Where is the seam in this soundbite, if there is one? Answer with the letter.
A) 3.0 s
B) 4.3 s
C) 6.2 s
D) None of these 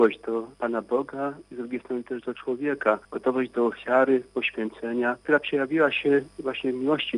D